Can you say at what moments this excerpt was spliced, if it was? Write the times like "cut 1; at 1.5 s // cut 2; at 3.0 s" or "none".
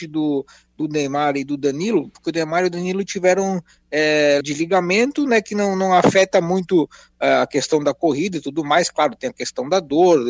cut 1; at 4.4 s